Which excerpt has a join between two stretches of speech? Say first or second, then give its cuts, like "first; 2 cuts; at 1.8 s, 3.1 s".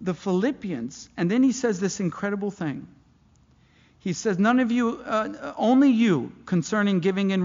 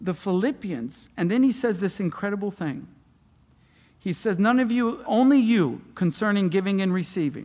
second; 1 cut; at 5.0 s